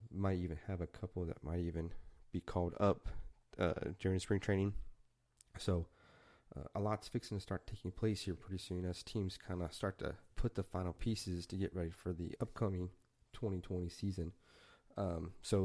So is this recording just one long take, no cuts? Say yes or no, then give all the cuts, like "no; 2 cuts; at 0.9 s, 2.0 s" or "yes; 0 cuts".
no; 2 cuts; at 10.3 s, 12.4 s